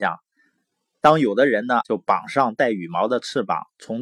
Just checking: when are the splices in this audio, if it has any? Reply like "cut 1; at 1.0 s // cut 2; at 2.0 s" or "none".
cut 1; at 1.8 s